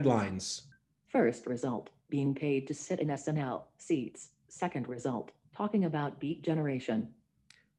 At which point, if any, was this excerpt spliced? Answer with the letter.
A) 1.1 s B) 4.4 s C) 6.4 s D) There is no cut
A